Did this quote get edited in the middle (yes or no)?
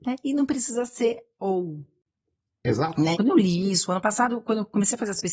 yes